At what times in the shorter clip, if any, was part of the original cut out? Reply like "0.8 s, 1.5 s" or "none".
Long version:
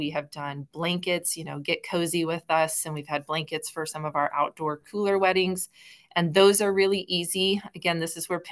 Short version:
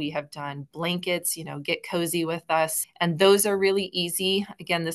2.8 s